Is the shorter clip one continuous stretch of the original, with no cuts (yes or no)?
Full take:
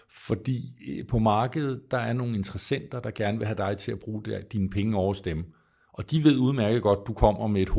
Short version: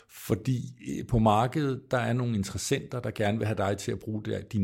yes